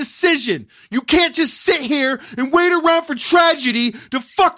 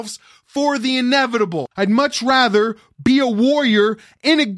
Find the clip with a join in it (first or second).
second